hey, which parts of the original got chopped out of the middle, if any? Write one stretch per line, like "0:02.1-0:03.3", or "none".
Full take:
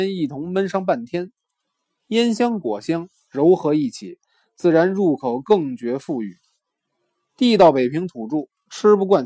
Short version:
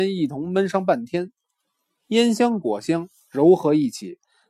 none